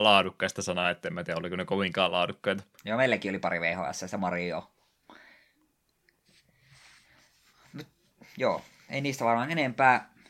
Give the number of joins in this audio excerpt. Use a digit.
1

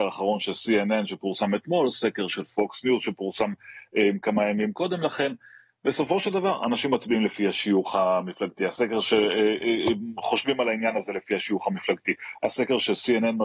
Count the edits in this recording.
0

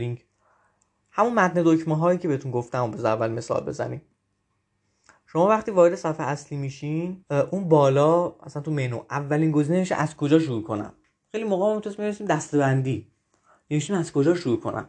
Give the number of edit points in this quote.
1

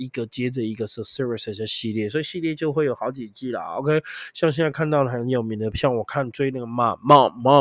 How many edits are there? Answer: 0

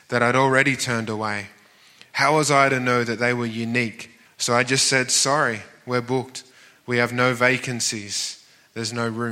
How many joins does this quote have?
1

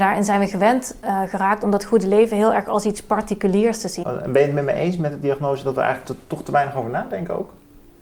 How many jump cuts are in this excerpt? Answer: 1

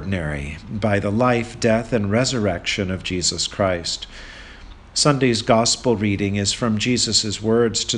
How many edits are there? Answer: 0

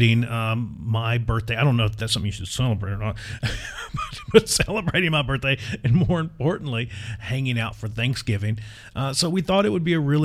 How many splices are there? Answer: 0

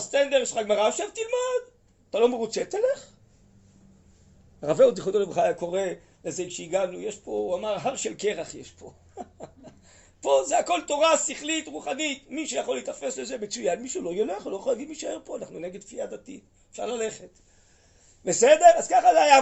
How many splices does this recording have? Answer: 0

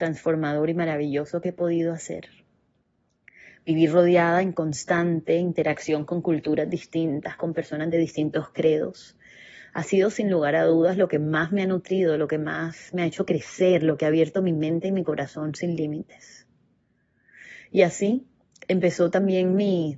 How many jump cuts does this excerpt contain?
0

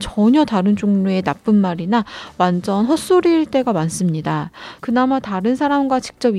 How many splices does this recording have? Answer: 1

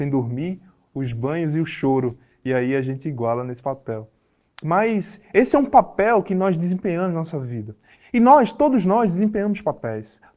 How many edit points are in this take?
1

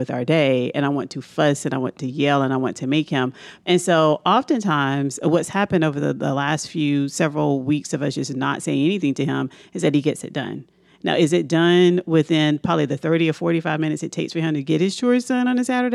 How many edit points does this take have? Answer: 1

